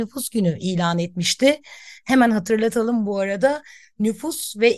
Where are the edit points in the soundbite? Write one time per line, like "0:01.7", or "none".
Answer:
none